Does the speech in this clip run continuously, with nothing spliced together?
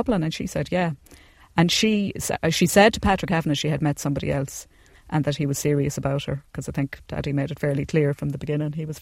yes; 0 cuts

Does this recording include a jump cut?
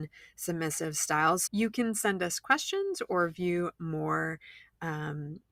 yes; 1 cut; at 1.5 s

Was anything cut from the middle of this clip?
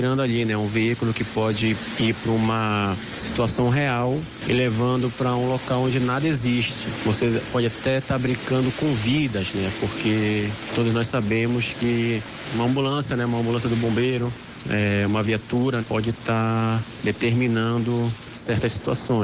yes; 1 cut; at 15.8 s

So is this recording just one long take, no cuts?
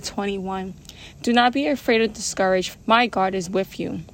no; 2 cuts; at 1.1 s, 2.7 s

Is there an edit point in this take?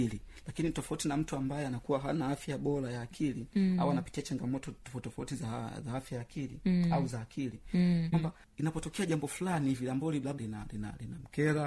yes; 2 cuts; at 8.1 s, 10.4 s

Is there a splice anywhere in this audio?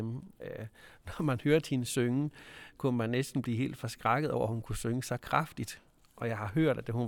no; 0 cuts

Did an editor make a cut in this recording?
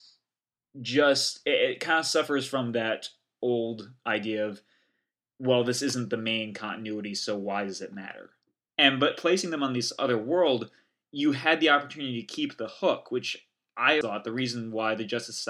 yes; 2 cuts; at 8.7 s, 14.0 s

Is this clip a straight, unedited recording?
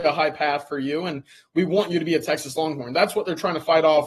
yes; 0 cuts

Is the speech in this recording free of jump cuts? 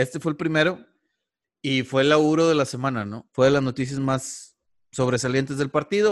no; 1 cut; at 3.3 s

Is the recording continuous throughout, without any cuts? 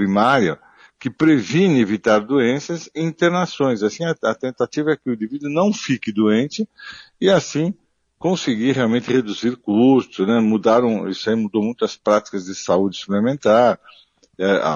yes; 0 cuts

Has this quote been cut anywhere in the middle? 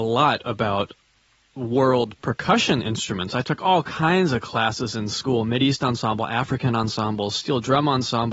no; 0 cuts

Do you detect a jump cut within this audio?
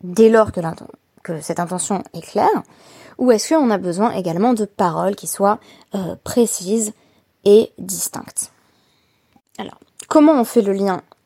no; 0 cuts

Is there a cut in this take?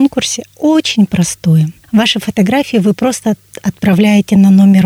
no; 0 cuts

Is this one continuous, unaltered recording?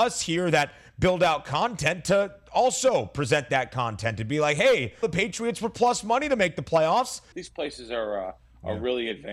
no; 2 cuts; at 5.0 s, 7.3 s

